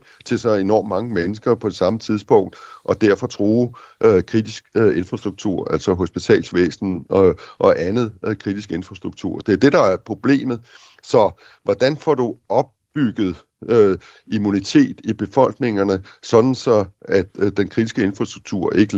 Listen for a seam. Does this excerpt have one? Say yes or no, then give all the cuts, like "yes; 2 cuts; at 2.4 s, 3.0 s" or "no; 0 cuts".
no; 0 cuts